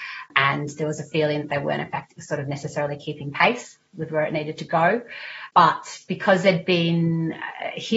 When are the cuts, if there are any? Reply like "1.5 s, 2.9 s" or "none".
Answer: 3.9 s